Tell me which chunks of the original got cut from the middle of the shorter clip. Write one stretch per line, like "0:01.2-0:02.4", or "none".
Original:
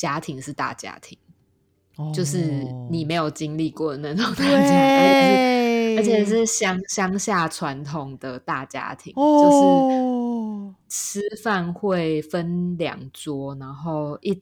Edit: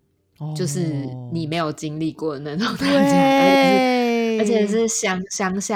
none